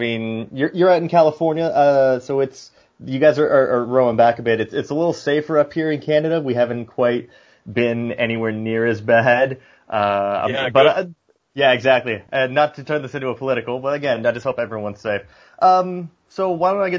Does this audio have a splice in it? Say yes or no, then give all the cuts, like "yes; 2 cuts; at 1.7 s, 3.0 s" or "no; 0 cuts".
no; 0 cuts